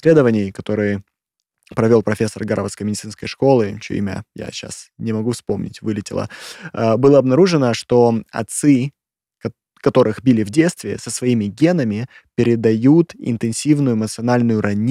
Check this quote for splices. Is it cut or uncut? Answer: uncut